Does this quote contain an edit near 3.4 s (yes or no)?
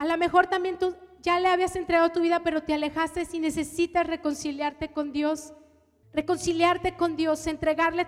no